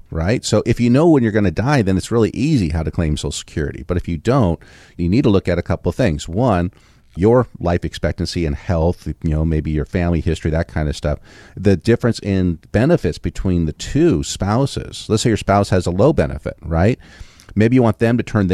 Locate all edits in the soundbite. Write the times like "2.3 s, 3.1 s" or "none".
none